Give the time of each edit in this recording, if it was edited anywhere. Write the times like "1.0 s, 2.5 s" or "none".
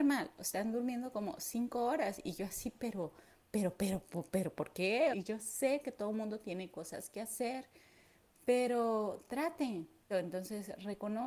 5.1 s, 10.1 s